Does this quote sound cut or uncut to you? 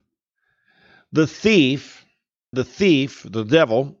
cut